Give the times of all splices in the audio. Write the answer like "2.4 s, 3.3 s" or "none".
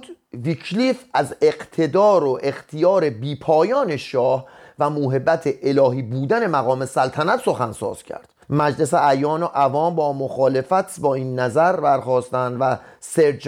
8.4 s